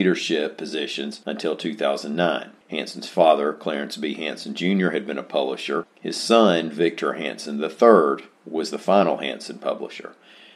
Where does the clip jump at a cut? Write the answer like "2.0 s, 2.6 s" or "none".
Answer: 5.9 s, 8.3 s